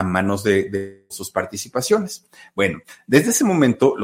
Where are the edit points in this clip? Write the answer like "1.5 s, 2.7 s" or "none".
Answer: 1.1 s